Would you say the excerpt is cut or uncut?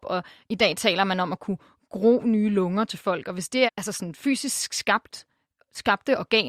cut